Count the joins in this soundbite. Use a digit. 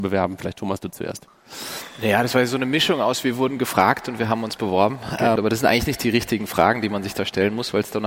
1